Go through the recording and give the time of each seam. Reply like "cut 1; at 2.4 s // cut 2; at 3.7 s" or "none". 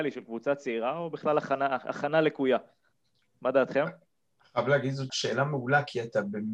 cut 1; at 5.1 s

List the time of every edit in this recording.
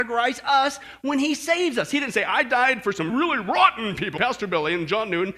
cut 1; at 3.1 s // cut 2; at 4.2 s

